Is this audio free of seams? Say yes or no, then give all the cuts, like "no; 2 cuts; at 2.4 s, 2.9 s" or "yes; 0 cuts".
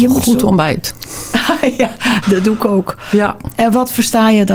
no; 1 cut; at 2.2 s